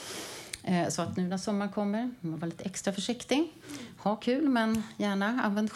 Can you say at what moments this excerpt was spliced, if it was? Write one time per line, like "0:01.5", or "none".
none

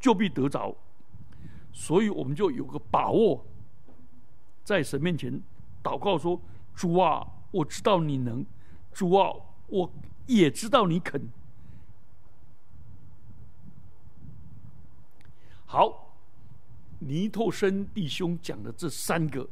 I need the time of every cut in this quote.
0:12.3

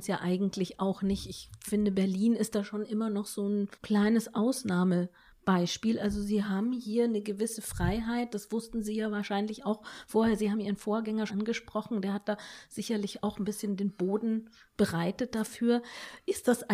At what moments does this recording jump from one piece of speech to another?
0:03.7
0:11.3

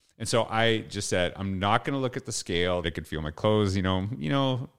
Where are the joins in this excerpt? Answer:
0:02.8

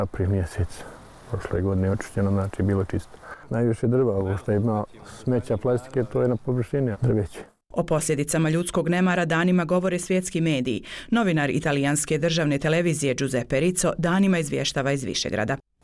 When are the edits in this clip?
0:06.9

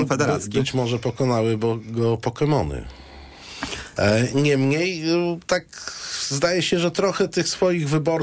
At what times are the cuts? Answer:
0:04.0

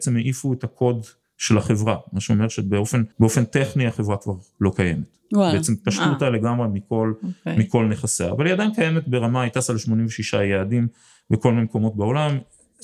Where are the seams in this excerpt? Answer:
0:03.1

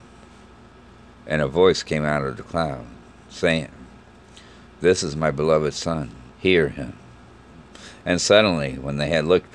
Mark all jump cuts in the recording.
0:06.3

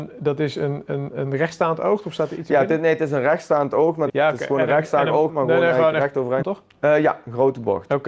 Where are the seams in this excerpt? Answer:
0:04.1
0:05.3
0:06.4

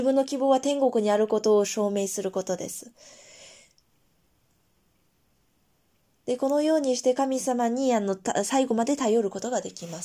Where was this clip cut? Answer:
none

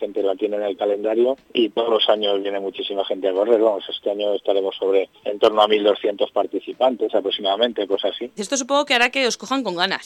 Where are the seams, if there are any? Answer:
0:01.4
0:05.2
0:08.4

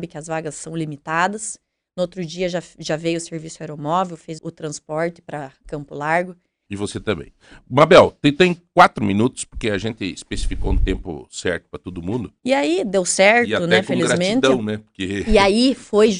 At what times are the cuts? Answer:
0:04.4
0:06.7
0:12.4

